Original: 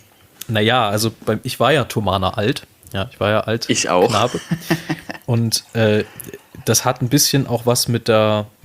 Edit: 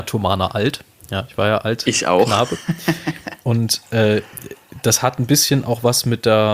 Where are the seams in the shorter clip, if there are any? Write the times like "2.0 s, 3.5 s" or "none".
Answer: none